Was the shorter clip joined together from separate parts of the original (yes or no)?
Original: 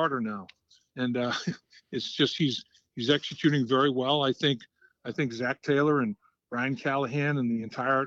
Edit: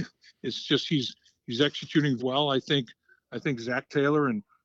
yes